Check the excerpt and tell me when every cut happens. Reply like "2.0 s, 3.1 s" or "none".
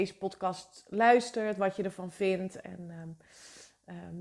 none